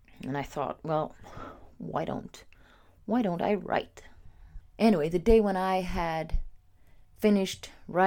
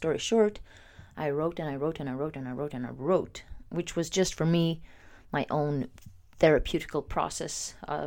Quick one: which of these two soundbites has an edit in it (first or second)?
first